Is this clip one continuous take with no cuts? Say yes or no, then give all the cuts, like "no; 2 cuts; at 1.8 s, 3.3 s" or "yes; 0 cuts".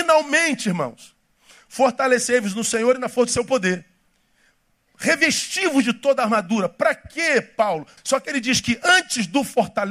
no; 1 cut; at 8.0 s